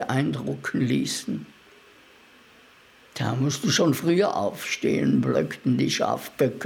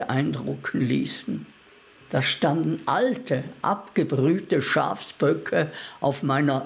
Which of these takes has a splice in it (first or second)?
second